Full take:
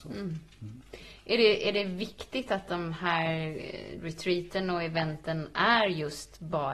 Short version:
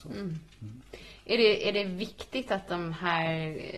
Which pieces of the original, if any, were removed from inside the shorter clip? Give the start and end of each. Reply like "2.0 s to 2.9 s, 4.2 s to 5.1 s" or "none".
none